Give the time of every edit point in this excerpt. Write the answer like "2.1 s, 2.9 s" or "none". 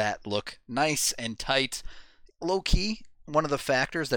2.3 s